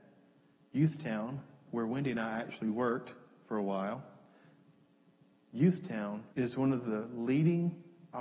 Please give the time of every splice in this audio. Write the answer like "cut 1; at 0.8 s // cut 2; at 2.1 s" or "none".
cut 1; at 6.3 s